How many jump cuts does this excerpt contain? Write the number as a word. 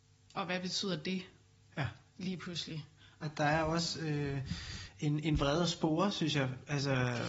one